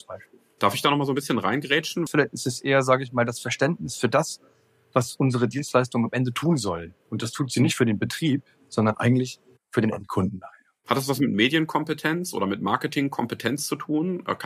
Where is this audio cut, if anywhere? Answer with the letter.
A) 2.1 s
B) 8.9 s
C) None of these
A